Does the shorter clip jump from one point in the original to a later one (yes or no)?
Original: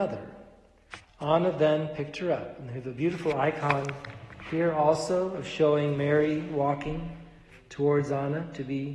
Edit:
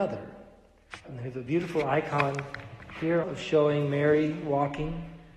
yes